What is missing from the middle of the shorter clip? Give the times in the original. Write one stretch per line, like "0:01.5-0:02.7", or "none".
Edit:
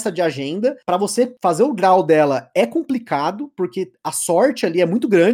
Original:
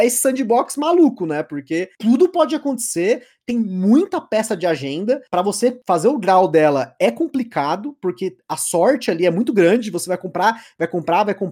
none